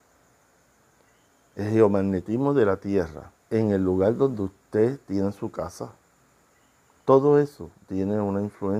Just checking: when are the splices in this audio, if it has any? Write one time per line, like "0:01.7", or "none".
0:03.4